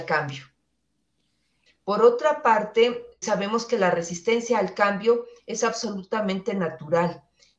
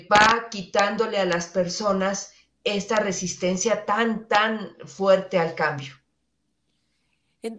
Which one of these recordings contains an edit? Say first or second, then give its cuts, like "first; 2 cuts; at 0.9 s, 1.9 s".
first; 2 cuts; at 1.7 s, 3.2 s